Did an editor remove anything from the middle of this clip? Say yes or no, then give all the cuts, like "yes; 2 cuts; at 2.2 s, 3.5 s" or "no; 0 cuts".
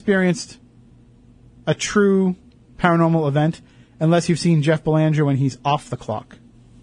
no; 0 cuts